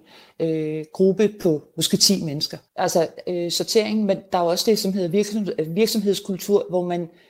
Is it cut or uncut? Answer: cut